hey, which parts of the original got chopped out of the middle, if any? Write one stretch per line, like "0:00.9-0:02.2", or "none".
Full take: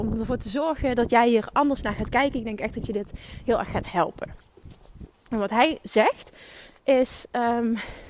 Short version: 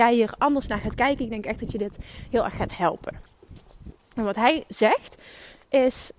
none